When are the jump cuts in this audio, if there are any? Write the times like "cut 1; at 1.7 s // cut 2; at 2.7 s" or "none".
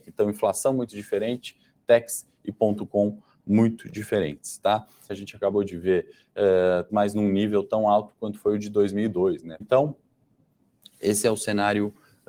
cut 1; at 5.1 s // cut 2; at 6.9 s // cut 3; at 9.6 s